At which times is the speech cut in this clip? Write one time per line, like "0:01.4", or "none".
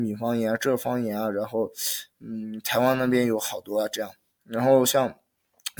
none